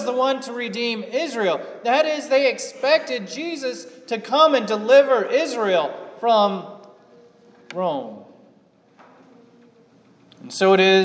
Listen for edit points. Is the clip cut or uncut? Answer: uncut